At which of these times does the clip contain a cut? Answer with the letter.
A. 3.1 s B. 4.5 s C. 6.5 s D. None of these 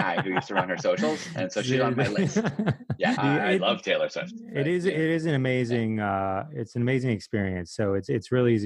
A